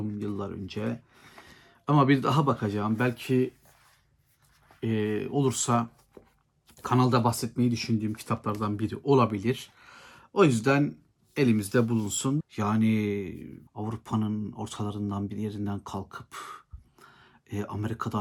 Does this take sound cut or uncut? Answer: cut